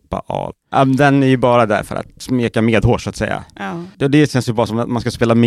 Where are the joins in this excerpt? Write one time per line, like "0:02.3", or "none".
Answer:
none